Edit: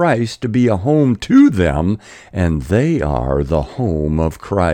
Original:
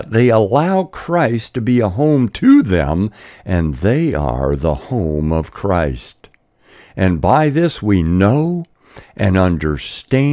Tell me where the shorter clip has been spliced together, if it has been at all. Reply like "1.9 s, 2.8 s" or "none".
none